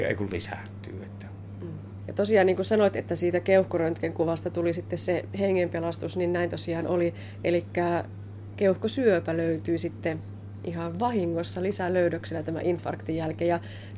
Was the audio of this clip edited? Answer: yes; 1 cut; at 2.0 s

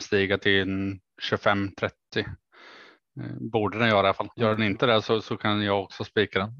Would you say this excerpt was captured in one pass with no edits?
no; 1 cut; at 4.3 s

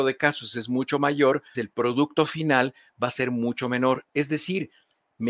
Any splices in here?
yes; 1 cut; at 1.5 s

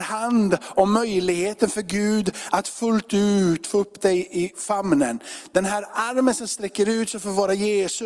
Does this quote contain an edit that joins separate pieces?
no; 0 cuts

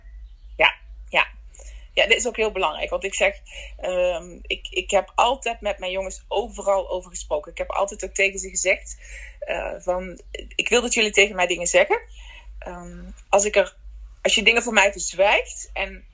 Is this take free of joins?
yes; 0 cuts

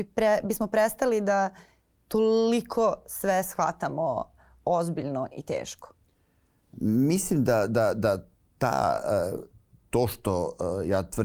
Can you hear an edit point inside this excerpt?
no; 0 cuts

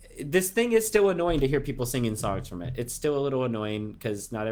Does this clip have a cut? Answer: no; 0 cuts

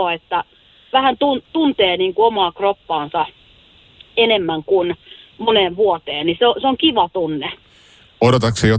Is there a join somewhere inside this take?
no; 0 cuts

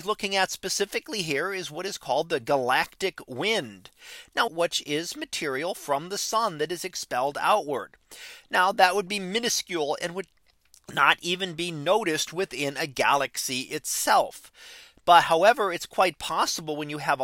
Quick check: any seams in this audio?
yes; 1 cut; at 4.5 s

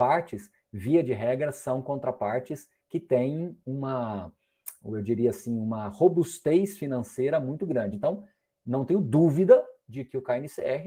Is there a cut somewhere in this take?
no; 0 cuts

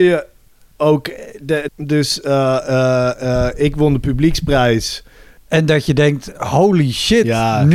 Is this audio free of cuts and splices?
no; 2 cuts; at 1.7 s, 5.4 s

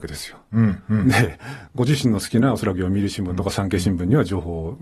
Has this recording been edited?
no; 0 cuts

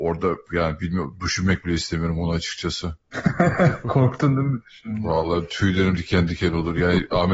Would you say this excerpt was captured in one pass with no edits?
yes; 0 cuts

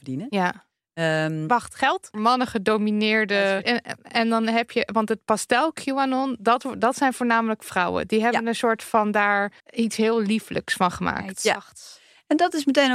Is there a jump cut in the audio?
yes; 3 cuts; at 2.1 s, 3.6 s, 9.6 s

